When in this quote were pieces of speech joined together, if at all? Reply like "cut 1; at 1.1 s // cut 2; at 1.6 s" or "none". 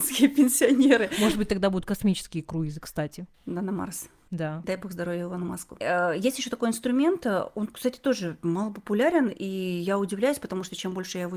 none